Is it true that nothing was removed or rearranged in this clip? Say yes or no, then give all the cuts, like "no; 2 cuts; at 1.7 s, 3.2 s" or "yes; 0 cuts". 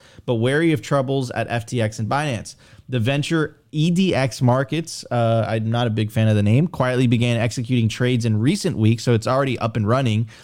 yes; 0 cuts